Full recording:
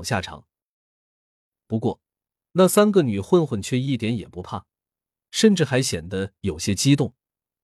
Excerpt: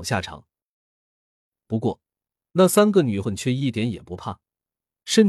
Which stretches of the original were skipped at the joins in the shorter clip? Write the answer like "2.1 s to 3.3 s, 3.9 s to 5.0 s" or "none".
3.2 s to 3.5 s